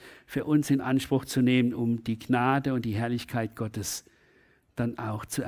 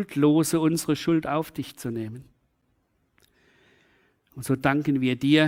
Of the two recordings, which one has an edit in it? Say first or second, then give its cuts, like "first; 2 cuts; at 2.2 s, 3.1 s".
second; 1 cut; at 4.2 s